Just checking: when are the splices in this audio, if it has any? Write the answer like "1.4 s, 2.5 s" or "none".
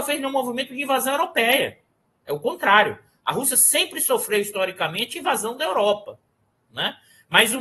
none